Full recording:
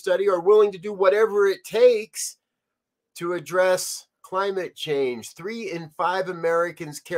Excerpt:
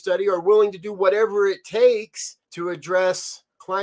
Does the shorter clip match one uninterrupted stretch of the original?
no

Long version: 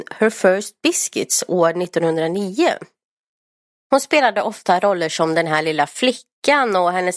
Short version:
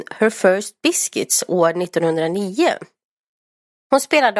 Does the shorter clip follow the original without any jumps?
yes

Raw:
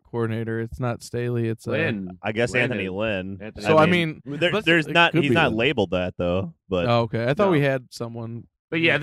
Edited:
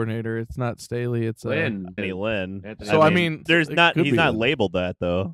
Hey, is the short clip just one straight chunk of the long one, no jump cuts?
no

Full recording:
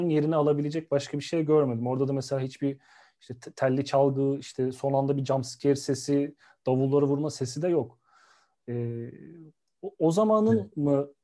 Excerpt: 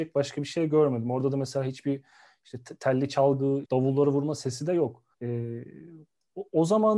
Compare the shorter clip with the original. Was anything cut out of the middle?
yes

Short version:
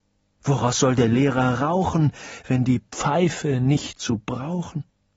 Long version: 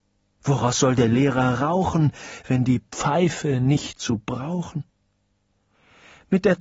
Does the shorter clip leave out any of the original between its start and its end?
no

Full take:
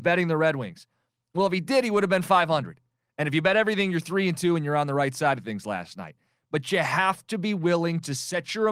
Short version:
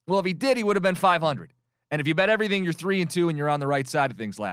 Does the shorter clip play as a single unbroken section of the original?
yes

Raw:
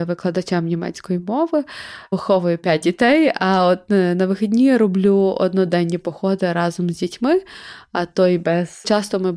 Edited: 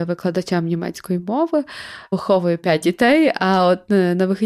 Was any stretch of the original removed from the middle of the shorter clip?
no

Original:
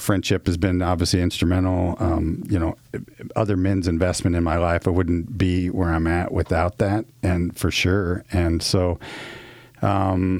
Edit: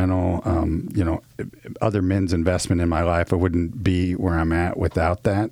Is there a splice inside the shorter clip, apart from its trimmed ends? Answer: no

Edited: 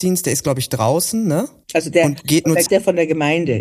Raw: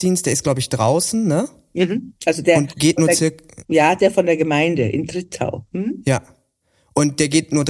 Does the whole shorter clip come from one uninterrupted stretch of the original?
no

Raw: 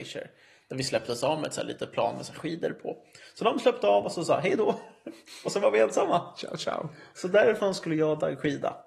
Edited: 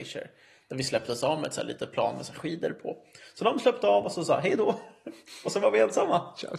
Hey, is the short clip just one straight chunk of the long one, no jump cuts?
yes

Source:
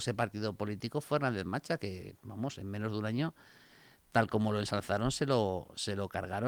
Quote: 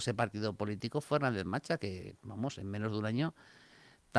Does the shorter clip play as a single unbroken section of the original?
yes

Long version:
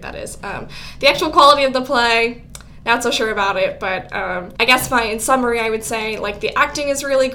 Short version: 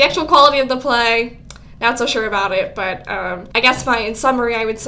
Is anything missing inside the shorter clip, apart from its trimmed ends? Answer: no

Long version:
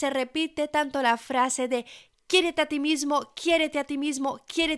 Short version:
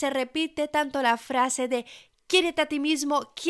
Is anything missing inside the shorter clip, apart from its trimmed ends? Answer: no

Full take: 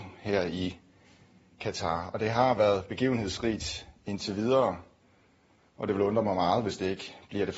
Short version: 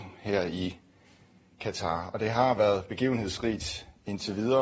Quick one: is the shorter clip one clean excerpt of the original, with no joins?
yes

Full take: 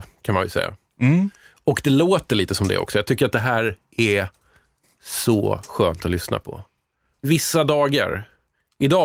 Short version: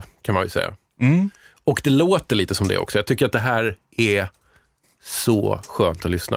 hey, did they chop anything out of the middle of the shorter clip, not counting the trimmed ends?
no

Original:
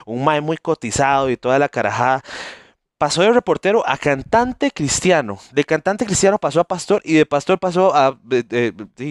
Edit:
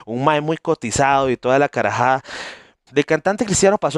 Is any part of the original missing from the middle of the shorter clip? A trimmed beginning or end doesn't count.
yes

